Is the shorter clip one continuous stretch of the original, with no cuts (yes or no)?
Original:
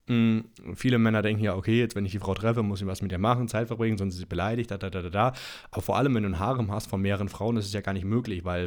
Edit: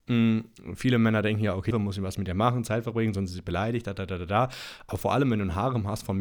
no